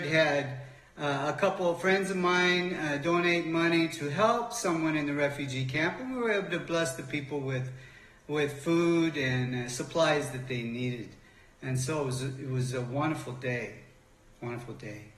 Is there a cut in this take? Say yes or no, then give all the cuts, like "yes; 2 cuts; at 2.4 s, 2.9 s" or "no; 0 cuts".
no; 0 cuts